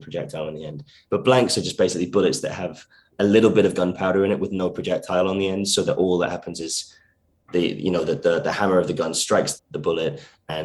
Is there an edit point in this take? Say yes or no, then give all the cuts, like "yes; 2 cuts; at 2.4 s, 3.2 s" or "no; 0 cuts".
yes; 1 cut; at 9.6 s